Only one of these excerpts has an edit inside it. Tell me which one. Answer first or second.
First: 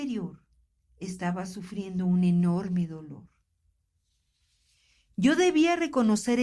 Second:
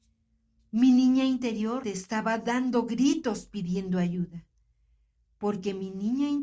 second